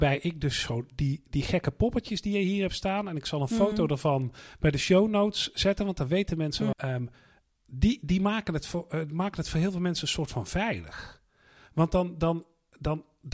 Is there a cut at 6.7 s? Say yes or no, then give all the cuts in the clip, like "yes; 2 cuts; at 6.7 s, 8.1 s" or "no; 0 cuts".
yes; 1 cut; at 6.7 s